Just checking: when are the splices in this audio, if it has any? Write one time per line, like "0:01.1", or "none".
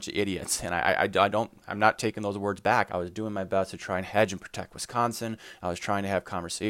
0:02.9